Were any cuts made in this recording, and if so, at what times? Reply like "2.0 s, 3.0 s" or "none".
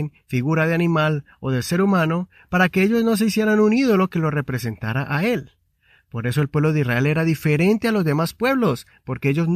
none